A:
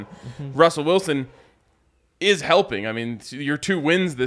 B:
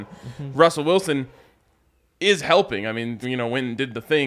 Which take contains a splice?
B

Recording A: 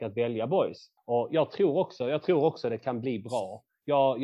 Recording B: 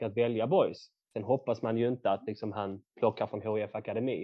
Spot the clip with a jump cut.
A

